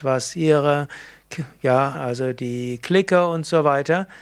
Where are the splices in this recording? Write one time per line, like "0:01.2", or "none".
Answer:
0:01.9

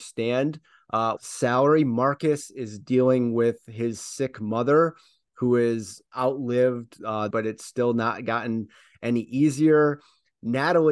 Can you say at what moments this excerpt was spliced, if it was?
0:01.2
0:07.3

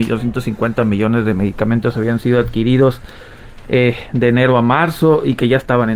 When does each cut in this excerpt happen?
none

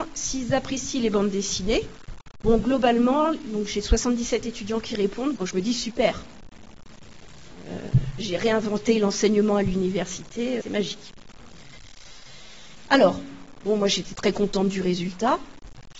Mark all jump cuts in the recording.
0:05.4
0:10.6
0:12.9

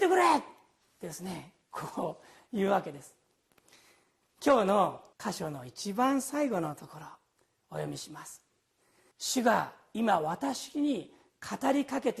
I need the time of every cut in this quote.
0:05.1
0:09.1

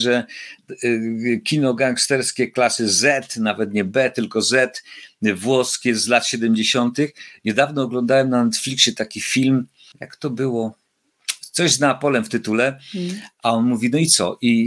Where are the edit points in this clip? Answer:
0:07.4
0:13.4

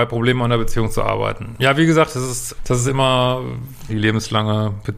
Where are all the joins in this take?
0:02.6
0:03.9

